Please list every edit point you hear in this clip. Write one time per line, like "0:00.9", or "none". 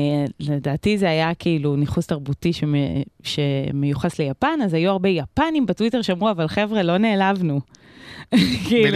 none

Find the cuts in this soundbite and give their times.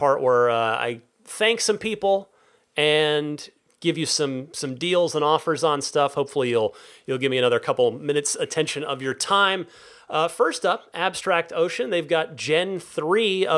none

